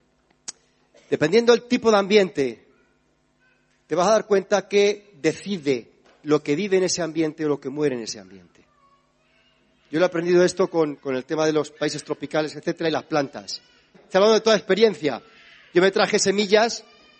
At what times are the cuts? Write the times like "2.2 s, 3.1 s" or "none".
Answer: 11.0 s, 13.9 s